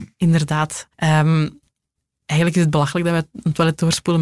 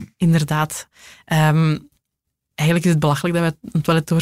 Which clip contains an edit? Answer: first; 1 cut; at 0.9 s

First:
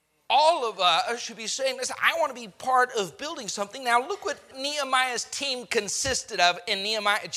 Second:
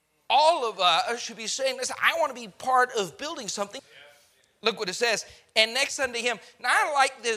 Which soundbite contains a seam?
second; 1 cut; at 3.8 s

